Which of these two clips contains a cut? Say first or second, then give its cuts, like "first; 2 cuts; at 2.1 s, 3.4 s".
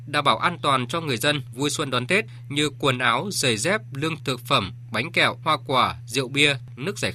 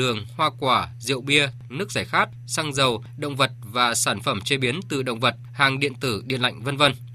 first; 2 cuts; at 4.2 s, 5.4 s